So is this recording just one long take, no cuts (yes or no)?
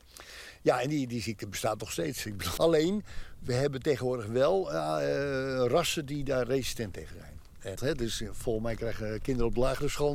no